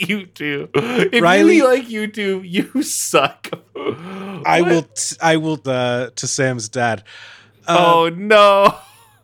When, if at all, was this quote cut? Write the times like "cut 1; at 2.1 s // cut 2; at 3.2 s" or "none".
cut 1; at 3.6 s // cut 2; at 5.6 s